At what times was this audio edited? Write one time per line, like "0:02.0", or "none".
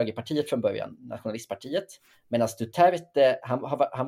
none